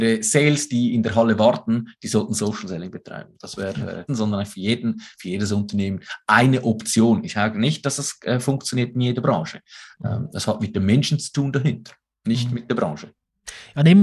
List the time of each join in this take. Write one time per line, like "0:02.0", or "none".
0:04.1